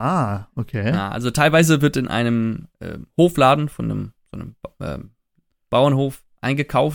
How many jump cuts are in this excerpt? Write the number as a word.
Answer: one